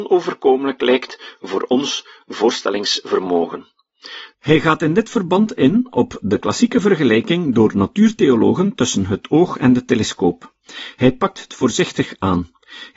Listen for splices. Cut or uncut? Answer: cut